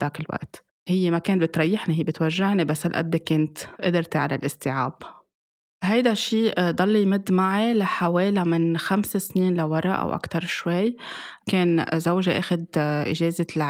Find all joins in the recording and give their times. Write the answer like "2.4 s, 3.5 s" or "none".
none